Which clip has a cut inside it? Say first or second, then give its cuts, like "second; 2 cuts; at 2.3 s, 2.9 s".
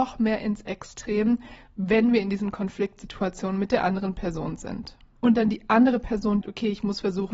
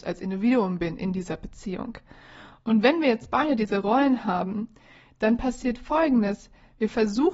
first; 2 cuts; at 5.2 s, 6.4 s